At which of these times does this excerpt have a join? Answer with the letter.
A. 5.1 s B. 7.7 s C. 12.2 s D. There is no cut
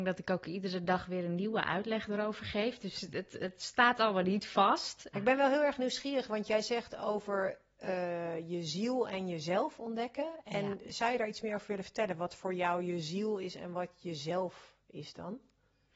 A